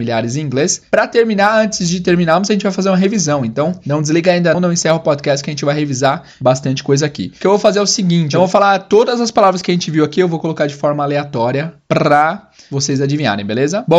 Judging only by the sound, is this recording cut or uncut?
cut